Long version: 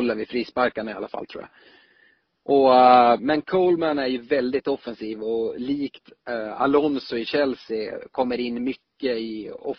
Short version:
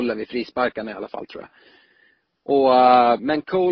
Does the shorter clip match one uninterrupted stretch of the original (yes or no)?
yes